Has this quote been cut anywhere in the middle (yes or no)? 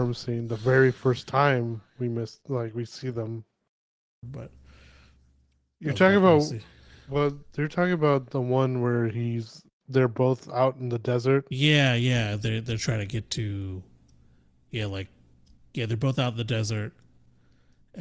yes